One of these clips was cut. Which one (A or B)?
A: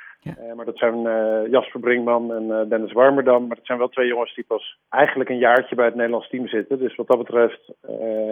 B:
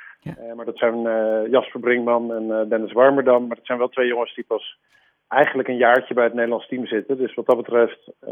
A